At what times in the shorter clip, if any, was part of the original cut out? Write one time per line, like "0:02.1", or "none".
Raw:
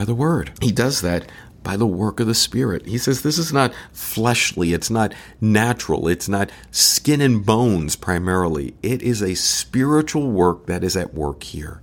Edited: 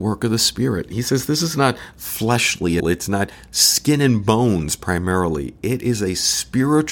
0:02.8